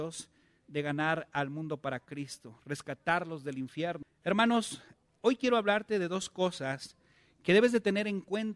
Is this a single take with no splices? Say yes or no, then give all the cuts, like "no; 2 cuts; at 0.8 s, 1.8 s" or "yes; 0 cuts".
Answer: no; 1 cut; at 4.0 s